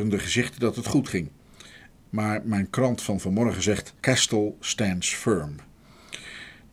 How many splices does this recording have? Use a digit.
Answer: 2